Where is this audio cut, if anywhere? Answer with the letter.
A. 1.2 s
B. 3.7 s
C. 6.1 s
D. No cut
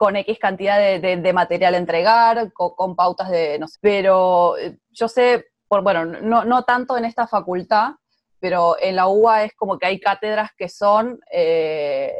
B